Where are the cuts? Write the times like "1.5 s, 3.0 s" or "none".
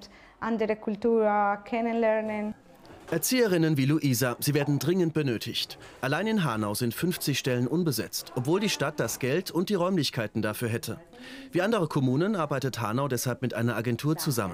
none